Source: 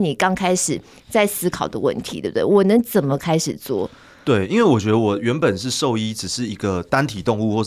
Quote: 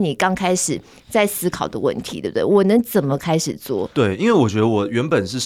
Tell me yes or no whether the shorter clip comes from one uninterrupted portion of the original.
no